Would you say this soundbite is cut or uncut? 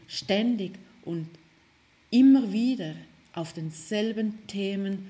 uncut